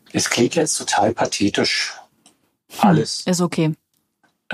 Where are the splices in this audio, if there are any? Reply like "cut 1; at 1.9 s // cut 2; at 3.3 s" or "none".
none